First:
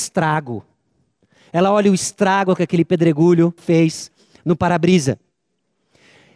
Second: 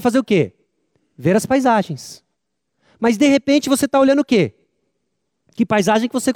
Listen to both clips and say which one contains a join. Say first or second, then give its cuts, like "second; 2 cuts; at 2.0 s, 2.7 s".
first; 1 cut; at 3.6 s